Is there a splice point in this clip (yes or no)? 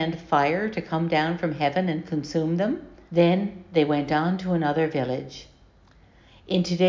yes